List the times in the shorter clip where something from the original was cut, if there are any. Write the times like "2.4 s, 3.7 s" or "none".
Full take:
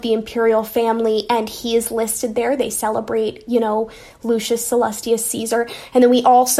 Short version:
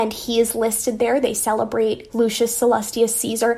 2.1 s